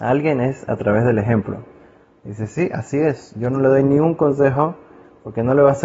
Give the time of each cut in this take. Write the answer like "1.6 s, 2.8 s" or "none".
2.1 s